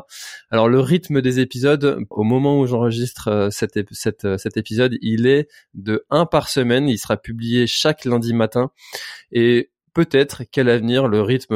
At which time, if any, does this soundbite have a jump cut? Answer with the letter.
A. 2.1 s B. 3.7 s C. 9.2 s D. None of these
A